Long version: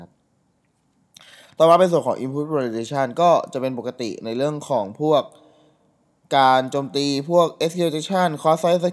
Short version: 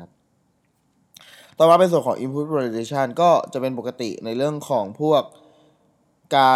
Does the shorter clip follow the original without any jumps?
yes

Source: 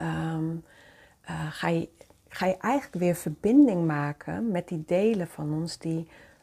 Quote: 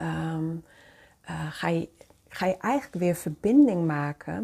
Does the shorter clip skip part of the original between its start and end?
no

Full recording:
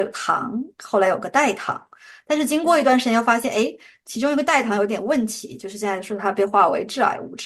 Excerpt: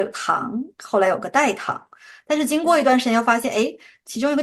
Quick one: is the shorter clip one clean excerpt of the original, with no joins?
yes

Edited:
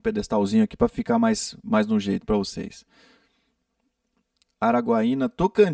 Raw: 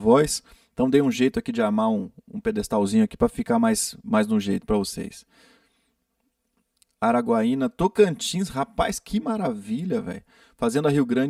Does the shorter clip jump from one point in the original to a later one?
no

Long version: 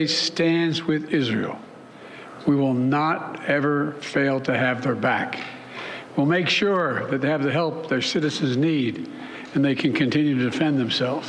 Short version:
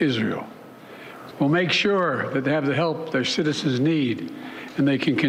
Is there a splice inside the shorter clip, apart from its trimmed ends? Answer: yes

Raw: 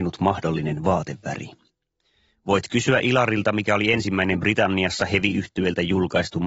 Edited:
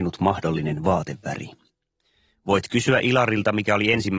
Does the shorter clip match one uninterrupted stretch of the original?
yes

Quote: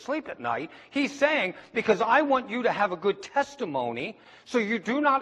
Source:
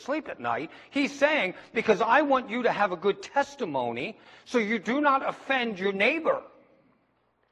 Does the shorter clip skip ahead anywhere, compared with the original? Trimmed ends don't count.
no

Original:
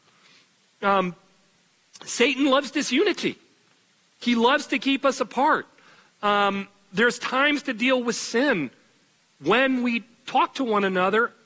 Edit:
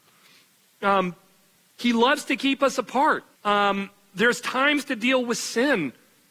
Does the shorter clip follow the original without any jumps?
no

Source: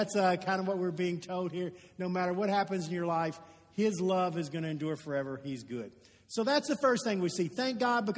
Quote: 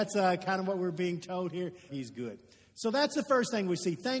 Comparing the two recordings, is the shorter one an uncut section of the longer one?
no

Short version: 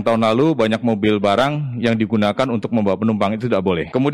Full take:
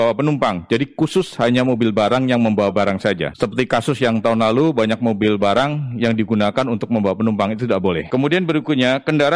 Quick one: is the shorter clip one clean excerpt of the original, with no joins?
yes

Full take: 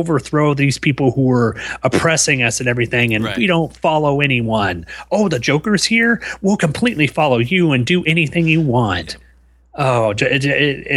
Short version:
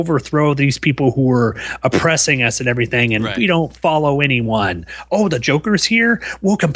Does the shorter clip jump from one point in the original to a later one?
no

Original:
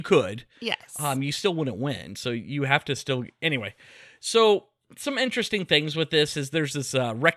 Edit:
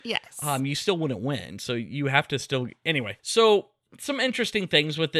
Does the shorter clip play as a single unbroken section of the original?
no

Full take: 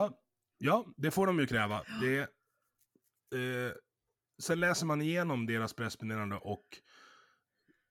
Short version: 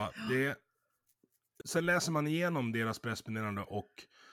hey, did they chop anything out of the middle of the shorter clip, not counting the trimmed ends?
yes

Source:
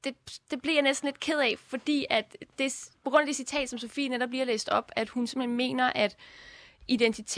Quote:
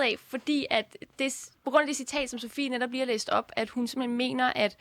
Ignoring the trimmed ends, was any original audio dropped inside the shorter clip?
no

